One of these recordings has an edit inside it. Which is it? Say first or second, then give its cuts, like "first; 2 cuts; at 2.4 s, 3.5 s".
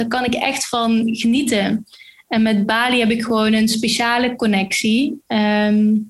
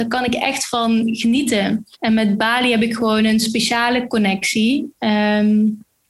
second; 1 cut; at 1.9 s